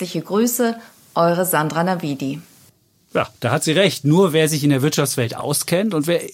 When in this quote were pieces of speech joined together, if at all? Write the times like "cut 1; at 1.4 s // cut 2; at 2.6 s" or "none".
none